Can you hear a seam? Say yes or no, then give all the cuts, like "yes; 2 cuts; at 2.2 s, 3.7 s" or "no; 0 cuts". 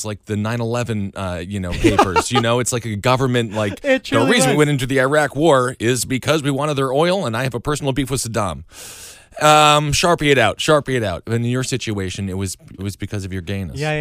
yes; 1 cut; at 12.8 s